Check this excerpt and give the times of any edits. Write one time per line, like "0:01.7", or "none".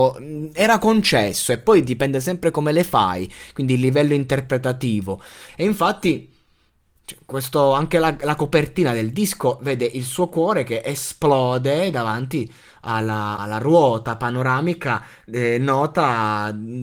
0:05.5
0:13.4